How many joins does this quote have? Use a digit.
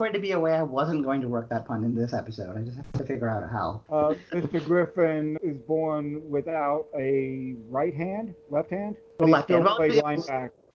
2